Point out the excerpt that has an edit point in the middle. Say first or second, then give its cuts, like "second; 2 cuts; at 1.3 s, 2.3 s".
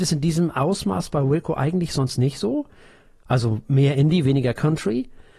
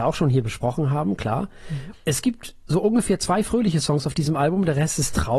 second; 1 cut; at 1.9 s